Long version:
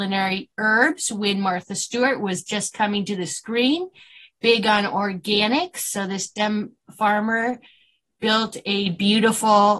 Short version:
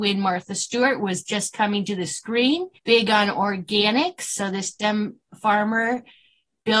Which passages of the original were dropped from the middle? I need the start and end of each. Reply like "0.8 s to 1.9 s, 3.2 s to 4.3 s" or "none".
4.0 s to 4.3 s